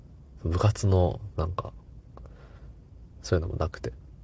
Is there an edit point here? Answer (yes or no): yes